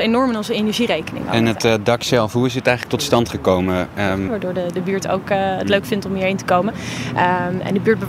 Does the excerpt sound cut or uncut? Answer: cut